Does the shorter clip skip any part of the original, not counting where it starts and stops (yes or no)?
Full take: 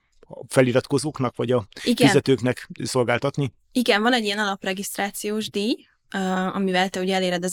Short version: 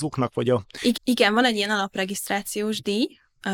yes